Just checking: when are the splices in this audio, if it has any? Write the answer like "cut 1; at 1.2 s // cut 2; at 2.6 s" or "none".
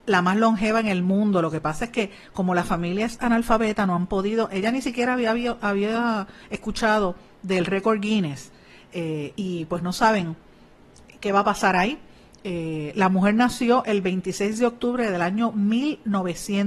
none